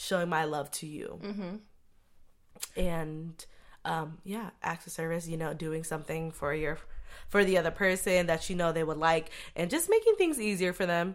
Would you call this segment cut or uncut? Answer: uncut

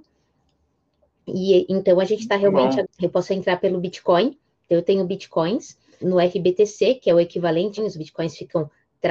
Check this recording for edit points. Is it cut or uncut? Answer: cut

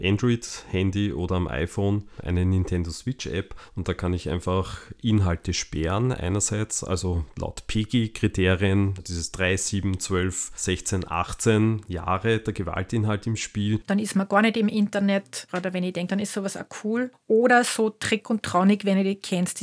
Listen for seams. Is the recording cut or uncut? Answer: cut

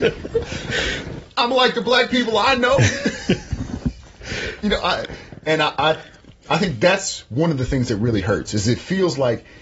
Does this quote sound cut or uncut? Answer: uncut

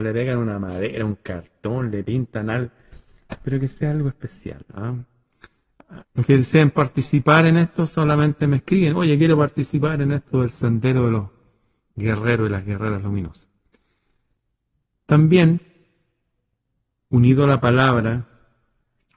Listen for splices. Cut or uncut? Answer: cut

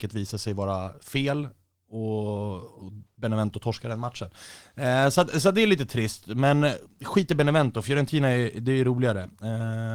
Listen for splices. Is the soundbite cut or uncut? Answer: uncut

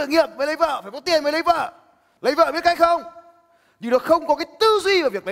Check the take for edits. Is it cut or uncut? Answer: cut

